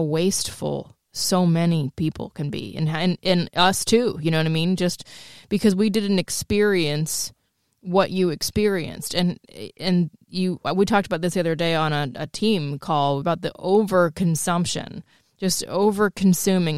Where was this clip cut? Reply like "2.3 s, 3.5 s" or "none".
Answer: 13.2 s